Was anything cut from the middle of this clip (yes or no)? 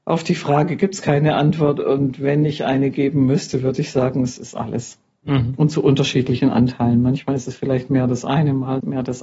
no